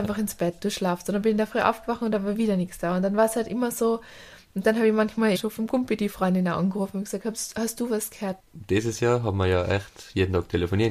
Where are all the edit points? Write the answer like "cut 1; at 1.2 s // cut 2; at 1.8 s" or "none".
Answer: cut 1; at 5.3 s // cut 2; at 8.4 s